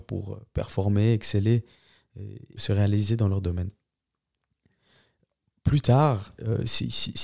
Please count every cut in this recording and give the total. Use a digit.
1